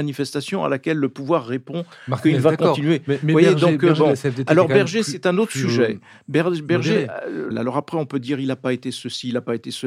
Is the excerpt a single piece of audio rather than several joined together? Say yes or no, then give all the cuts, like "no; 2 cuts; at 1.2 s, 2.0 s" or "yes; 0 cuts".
no; 1 cut; at 7.5 s